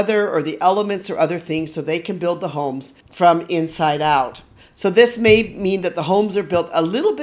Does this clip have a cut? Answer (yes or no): yes